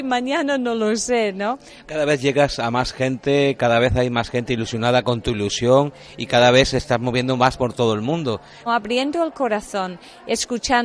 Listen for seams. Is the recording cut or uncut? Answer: cut